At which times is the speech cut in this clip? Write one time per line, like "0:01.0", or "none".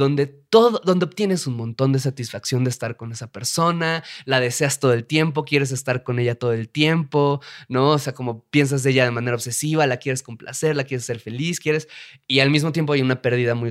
none